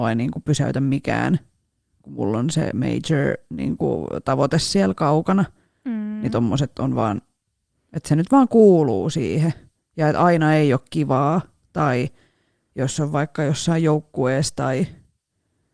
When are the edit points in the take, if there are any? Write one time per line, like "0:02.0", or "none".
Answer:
none